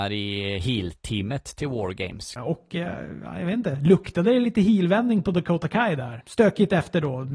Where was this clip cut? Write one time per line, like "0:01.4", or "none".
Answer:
0:02.4
0:06.2

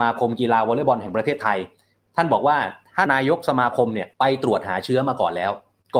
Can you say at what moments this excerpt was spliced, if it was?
0:03.1
0:04.1

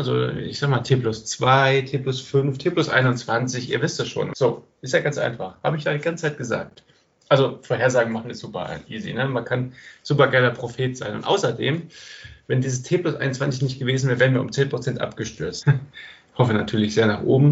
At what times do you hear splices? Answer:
0:04.3
0:15.6

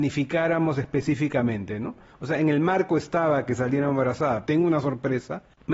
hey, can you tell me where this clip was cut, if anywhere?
0:02.1
0:04.4

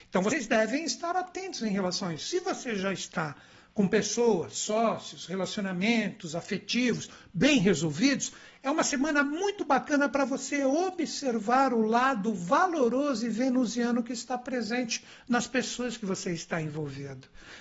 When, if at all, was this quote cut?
none

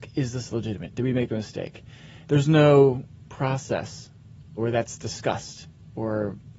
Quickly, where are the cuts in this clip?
0:02.2
0:04.6

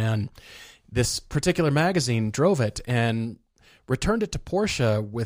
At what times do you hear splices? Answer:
none

